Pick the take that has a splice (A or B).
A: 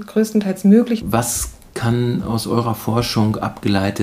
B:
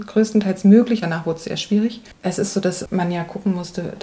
A